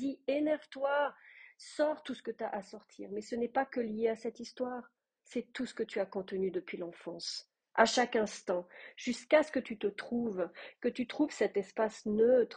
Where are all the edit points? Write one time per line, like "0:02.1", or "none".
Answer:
none

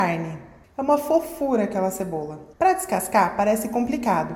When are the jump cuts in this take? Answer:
0:02.5

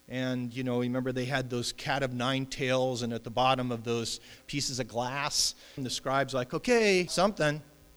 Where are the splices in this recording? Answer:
0:04.4
0:05.8
0:07.1

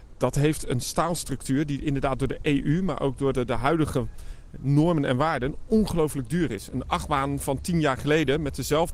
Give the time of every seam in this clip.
0:03.3

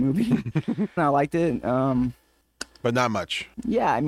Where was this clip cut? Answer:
0:01.0

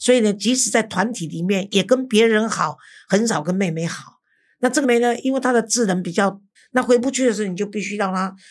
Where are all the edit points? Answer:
0:04.8
0:06.6

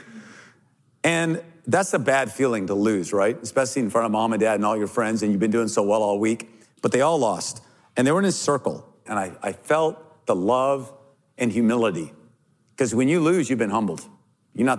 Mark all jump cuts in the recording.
0:09.1

